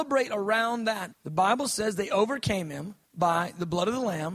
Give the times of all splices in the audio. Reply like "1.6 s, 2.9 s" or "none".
1.1 s, 3.0 s